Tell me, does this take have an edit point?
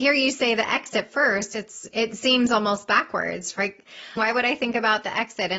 yes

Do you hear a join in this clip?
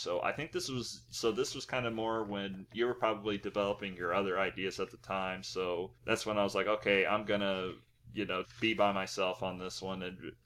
yes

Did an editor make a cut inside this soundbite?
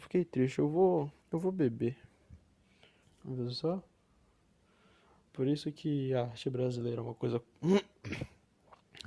yes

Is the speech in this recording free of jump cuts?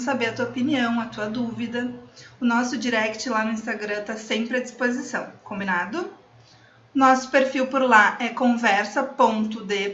yes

